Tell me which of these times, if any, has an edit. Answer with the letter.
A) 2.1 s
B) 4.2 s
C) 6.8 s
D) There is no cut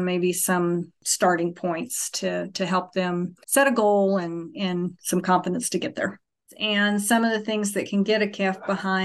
D